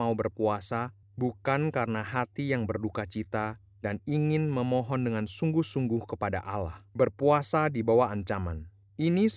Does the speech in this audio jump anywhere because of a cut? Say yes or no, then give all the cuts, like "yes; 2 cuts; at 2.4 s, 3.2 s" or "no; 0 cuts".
yes; 2 cuts; at 1.0 s, 6.9 s